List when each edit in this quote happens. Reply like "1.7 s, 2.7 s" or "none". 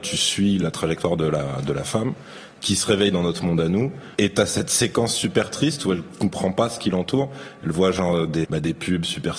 4.1 s, 8.4 s

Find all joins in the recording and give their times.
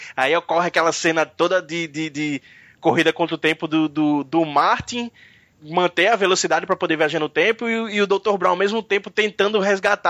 none

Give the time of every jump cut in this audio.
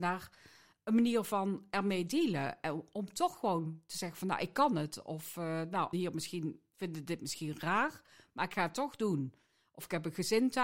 5.9 s

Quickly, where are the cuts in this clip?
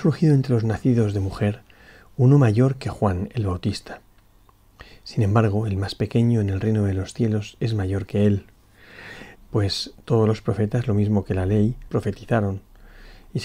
9.4 s, 11.9 s

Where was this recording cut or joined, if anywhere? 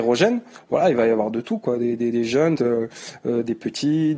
2.5 s

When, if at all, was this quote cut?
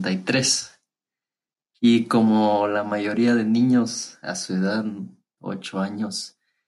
5.4 s

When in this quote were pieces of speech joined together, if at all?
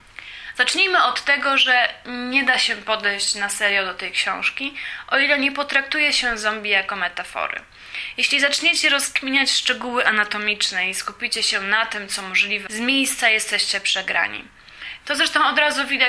12.7 s, 15.0 s

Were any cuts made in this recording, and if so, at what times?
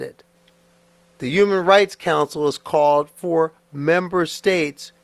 1.0 s

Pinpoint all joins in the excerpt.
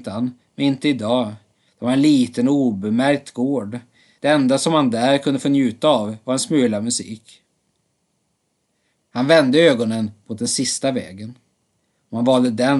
1.7 s, 9.0 s

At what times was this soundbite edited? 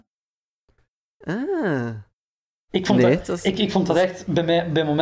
none

